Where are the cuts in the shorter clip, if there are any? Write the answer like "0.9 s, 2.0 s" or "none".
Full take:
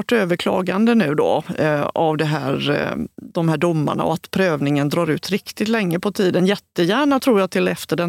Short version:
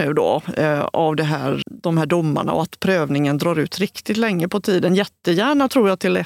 1.6 s